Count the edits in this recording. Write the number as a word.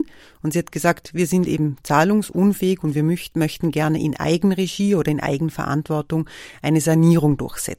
zero